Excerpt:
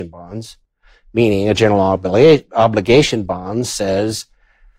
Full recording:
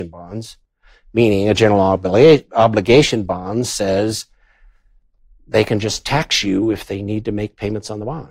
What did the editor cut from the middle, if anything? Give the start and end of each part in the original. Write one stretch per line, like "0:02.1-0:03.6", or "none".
none

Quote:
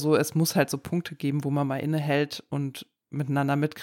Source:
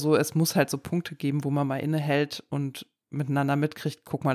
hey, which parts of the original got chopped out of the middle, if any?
none

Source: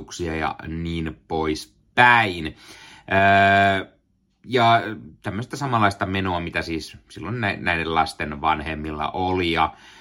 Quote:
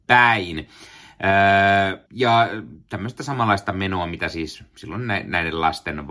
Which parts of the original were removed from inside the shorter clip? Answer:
0:03.9-0:04.4

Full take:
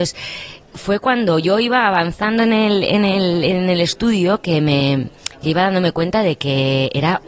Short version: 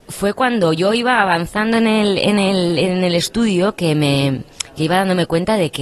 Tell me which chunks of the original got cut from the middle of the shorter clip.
none

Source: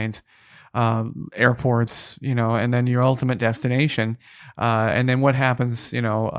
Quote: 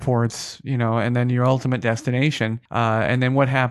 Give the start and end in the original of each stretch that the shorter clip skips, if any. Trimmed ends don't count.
0:04.2-0:04.5

